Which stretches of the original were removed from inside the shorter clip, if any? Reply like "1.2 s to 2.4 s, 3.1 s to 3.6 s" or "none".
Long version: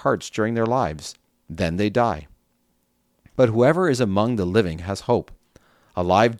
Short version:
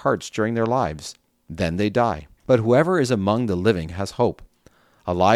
2.4 s to 3.3 s